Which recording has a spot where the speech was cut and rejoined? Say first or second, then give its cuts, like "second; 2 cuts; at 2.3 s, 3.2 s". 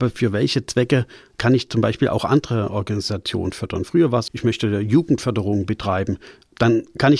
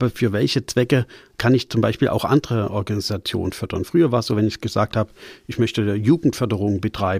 first; 1 cut; at 4.3 s